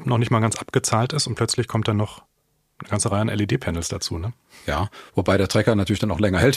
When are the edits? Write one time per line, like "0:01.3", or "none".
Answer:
none